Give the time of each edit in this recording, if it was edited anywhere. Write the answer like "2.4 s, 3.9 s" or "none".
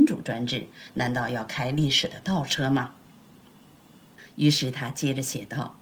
none